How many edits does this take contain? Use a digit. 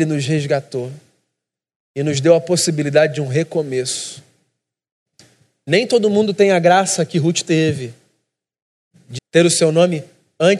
1